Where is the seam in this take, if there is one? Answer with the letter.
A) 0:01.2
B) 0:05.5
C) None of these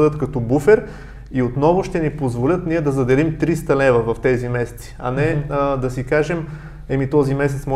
C